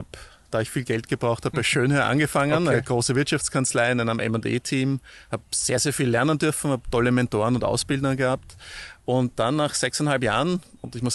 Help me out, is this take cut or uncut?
uncut